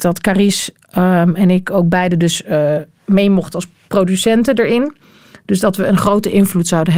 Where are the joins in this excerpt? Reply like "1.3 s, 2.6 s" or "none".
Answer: none